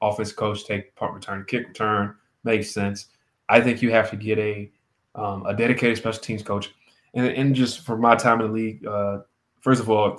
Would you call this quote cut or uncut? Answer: uncut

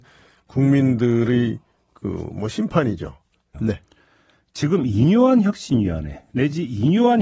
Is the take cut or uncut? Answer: cut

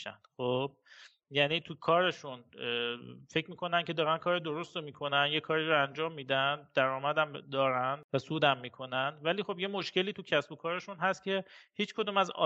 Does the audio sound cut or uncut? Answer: uncut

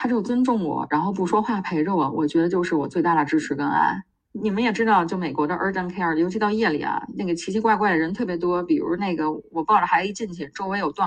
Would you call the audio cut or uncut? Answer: cut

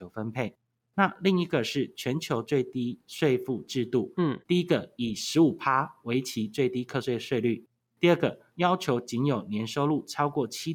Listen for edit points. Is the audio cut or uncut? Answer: uncut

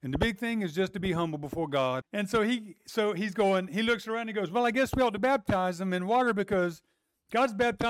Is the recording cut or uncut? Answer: cut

